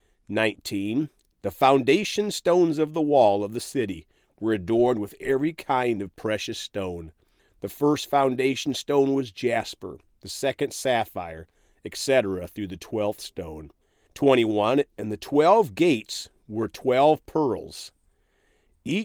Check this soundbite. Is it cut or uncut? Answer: uncut